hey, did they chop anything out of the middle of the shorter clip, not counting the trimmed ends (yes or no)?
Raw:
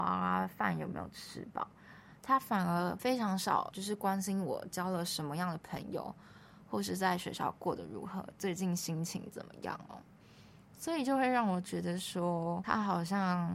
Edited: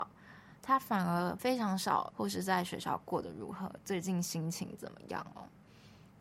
yes